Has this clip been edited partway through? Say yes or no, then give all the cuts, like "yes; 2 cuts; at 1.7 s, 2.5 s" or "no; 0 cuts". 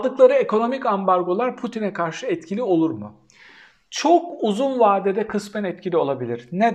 no; 0 cuts